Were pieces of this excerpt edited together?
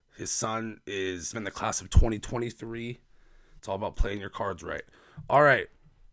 yes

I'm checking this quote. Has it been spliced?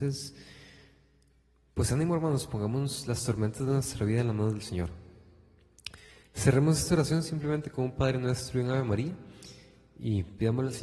no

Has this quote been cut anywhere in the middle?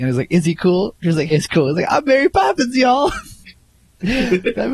yes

